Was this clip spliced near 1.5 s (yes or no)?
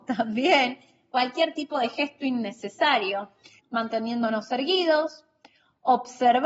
no